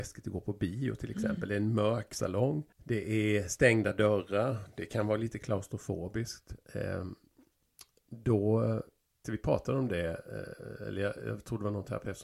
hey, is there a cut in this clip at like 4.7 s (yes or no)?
no